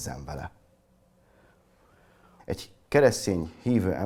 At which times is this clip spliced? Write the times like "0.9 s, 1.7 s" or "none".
2.4 s